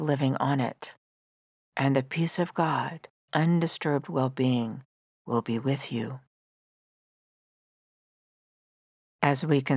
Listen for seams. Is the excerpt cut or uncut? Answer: cut